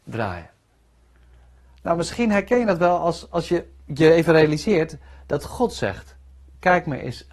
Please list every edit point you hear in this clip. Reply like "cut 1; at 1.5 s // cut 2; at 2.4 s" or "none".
none

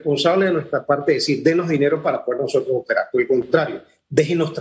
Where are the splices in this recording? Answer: none

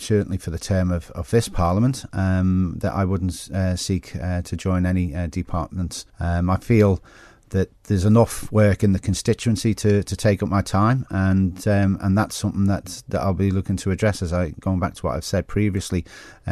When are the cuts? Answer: cut 1; at 6.1 s

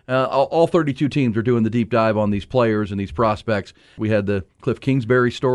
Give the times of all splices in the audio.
cut 1; at 4.0 s

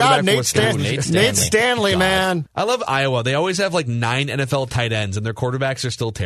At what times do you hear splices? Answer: cut 1; at 2.5 s

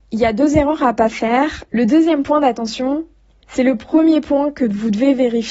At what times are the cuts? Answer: cut 1; at 1.7 s // cut 2; at 3.4 s

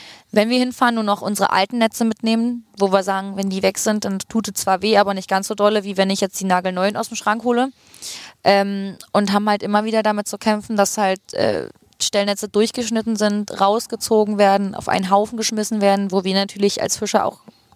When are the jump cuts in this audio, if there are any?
none

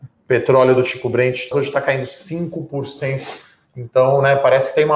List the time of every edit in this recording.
cut 1; at 1.5 s

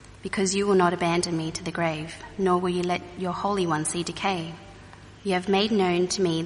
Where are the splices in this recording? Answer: cut 1; at 5.2 s

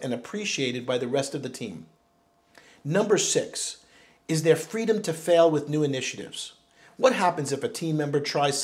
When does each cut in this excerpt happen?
none

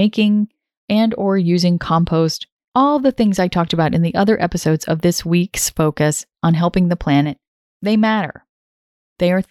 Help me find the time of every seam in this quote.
cut 1; at 2.7 s

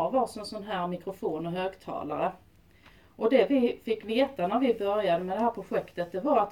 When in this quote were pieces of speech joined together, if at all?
none

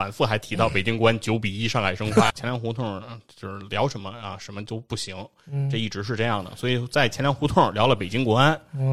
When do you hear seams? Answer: cut 1; at 2.3 s

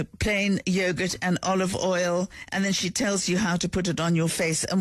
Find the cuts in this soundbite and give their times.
none

